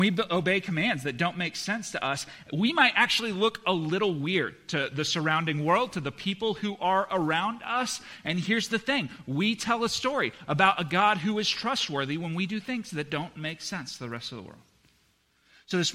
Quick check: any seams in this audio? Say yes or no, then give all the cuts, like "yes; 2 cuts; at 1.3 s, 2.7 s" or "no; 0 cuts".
no; 0 cuts